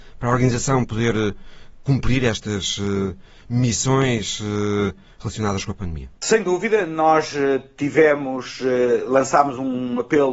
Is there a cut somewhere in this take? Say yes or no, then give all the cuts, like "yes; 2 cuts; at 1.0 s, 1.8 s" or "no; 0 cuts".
no; 0 cuts